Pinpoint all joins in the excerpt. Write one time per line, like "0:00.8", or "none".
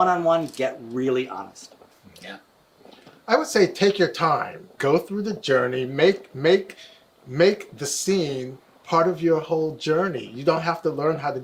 0:04.8